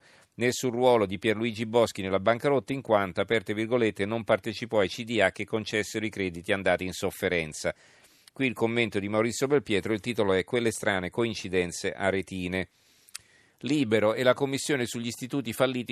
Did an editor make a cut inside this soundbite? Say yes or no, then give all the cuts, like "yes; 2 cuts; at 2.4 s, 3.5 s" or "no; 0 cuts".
no; 0 cuts